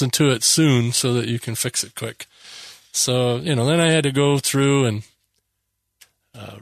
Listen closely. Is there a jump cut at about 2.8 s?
no; 0 cuts

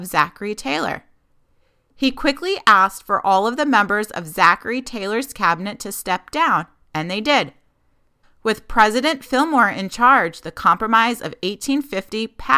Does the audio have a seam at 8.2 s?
yes; 1 cut; at 8.2 s

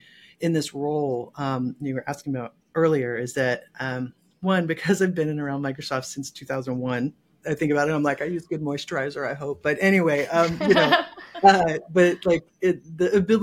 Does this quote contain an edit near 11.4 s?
no; 1 cut; at 7.4 s

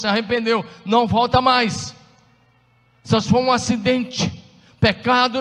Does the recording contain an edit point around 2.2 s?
no; 0 cuts

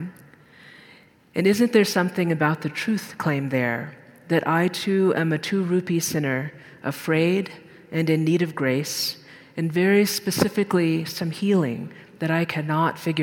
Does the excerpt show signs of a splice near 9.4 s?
no; 0 cuts

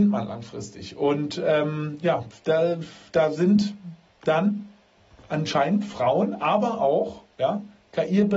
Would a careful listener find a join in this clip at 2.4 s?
no; 0 cuts

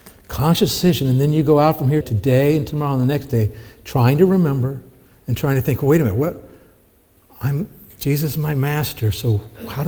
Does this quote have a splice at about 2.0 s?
yes; 1 cut; at 2.0 s

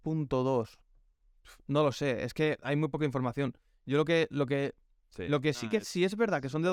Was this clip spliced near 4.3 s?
no; 0 cuts

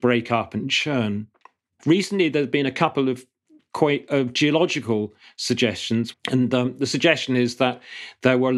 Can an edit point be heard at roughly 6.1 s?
yes; 2 cuts; at 1.8 s, 6.1 s

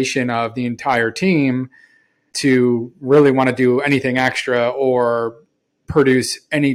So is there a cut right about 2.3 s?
yes; 1 cut; at 2.3 s

